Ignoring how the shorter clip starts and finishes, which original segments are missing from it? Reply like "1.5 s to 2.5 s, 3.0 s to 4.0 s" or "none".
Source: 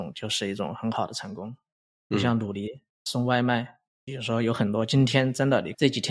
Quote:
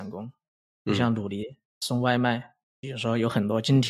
none